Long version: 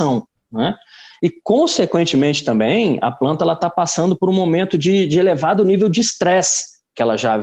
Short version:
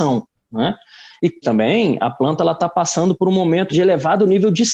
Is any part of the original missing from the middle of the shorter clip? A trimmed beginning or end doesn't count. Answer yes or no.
yes